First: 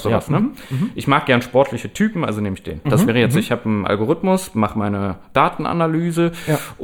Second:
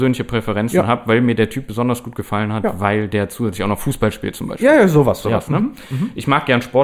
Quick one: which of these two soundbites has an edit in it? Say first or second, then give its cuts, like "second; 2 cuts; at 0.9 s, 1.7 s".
first; 1 cut; at 2.8 s